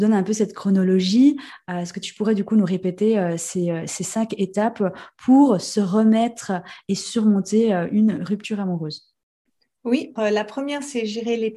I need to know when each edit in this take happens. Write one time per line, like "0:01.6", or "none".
0:10.2